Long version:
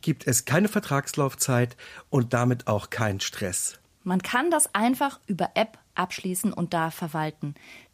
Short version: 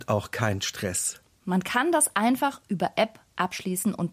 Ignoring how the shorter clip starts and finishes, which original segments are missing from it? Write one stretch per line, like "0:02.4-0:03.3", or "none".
none